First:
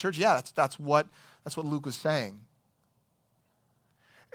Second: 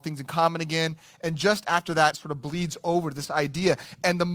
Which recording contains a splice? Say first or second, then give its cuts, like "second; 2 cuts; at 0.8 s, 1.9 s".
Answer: second; 1 cut; at 2.1 s